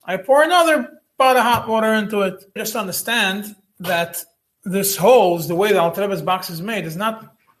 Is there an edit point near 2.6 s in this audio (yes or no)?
yes